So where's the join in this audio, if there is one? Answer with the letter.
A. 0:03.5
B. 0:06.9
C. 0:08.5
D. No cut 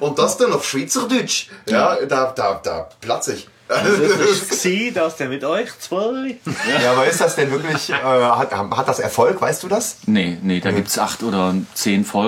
C